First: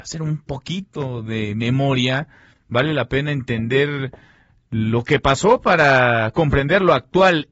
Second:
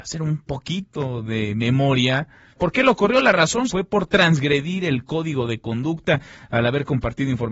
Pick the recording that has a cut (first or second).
second